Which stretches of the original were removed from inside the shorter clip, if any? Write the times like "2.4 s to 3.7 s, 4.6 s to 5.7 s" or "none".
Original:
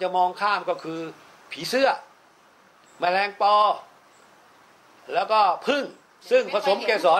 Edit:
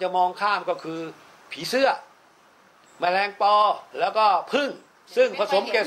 3.9 s to 5.0 s